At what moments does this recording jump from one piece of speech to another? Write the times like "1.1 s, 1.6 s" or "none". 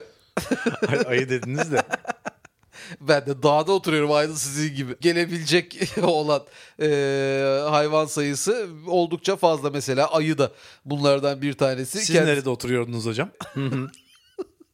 5.0 s, 13.3 s